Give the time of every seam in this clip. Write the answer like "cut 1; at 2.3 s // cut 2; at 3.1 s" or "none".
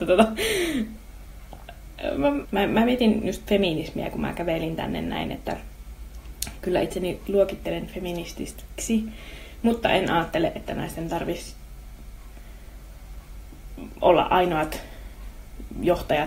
cut 1; at 2.4 s